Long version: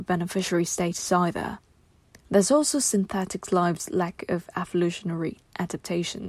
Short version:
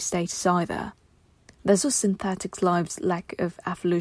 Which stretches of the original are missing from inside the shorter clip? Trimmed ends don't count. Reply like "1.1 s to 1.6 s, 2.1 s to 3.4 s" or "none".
2.5 s to 2.7 s